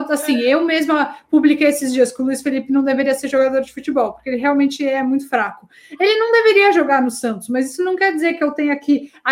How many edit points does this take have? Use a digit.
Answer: 0